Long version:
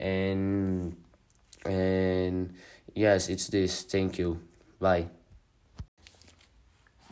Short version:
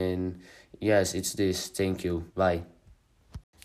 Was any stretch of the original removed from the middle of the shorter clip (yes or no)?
yes